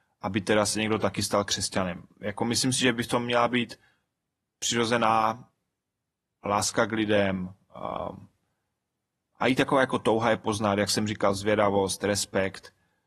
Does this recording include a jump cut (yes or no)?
no